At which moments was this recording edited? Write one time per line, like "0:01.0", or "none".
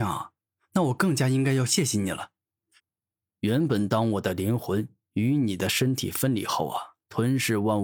0:02.8